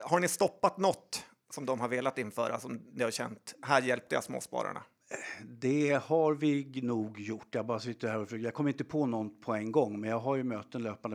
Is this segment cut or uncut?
uncut